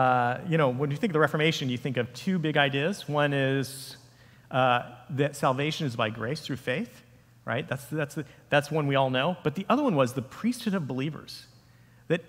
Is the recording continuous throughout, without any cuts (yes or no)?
yes